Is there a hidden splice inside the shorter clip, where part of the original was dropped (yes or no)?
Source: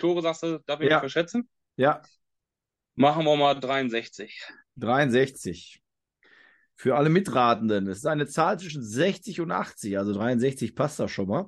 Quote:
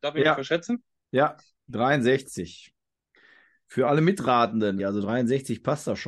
yes